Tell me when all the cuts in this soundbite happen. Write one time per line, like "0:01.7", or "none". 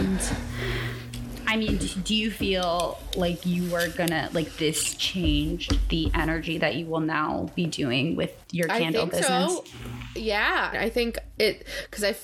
0:10.7

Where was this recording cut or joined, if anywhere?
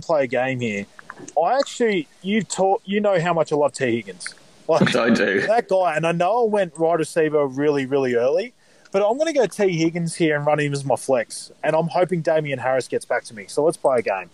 0:04.9

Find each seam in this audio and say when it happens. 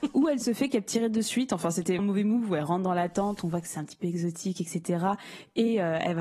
0:02.0

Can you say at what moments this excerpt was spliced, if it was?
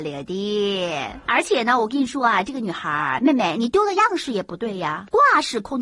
none

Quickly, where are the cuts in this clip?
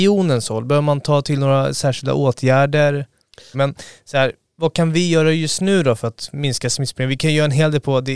0:03.5

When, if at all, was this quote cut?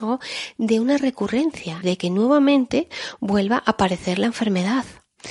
0:01.8

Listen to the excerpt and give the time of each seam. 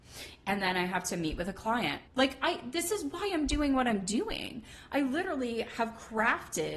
0:02.1

